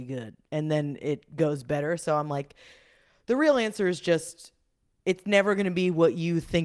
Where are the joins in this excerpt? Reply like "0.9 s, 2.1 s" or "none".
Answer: none